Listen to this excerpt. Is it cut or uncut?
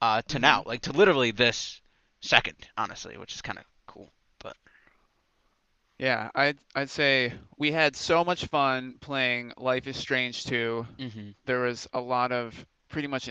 cut